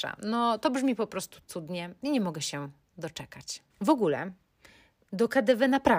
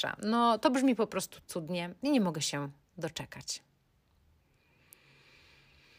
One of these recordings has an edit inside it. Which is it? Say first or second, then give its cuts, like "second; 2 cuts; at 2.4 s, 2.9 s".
first; 1 cut; at 3.7 s